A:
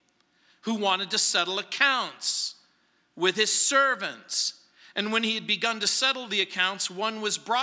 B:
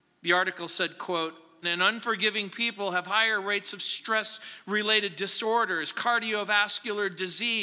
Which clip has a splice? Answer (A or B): B